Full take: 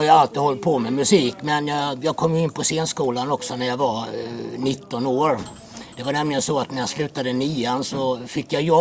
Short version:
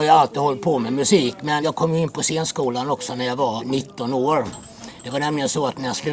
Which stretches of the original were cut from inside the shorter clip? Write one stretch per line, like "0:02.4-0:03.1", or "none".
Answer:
0:01.6-0:02.0
0:04.0-0:04.5